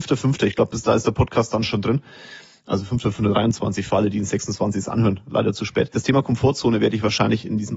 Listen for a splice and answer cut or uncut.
uncut